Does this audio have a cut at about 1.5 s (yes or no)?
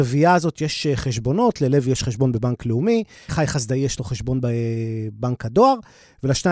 no